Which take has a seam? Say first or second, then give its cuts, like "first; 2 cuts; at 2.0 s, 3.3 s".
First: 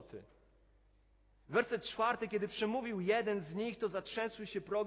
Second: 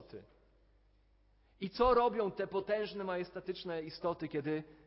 first; 1 cut; at 1.4 s